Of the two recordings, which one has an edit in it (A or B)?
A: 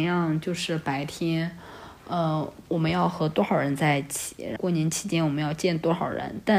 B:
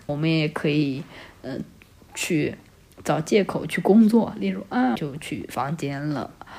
B